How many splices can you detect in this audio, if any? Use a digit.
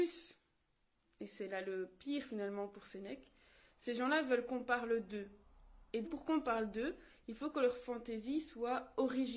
1